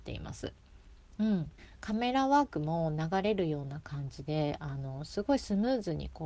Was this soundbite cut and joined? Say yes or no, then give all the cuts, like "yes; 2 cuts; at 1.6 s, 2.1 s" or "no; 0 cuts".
no; 0 cuts